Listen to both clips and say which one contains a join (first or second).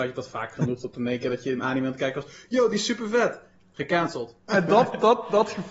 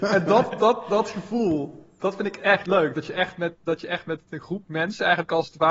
first